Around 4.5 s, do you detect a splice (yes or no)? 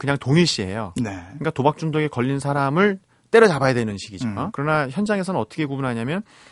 yes